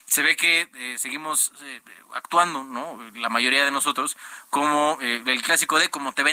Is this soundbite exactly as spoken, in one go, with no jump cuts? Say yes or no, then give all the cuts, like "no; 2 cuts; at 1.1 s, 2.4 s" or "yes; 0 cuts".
yes; 0 cuts